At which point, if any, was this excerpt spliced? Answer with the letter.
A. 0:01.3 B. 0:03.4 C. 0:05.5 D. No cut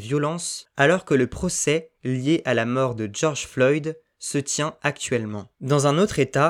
C